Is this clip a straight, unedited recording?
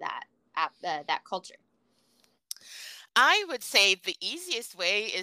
yes; 0 cuts

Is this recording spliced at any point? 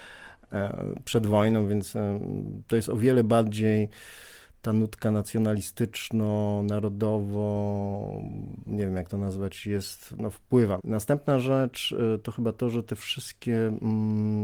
yes; 1 cut; at 10.8 s

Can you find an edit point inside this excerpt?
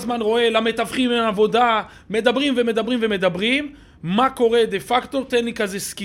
no; 0 cuts

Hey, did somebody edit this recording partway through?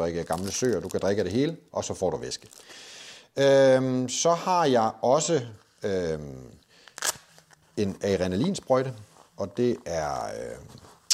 no; 0 cuts

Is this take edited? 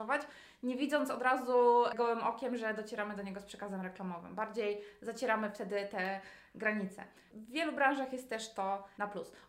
no; 0 cuts

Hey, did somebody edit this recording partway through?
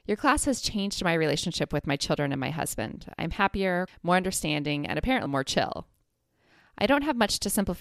yes; 2 cuts; at 3.9 s, 5.3 s

